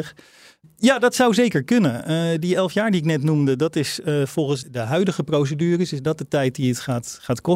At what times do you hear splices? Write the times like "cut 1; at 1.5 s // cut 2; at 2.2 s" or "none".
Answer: cut 1; at 4.6 s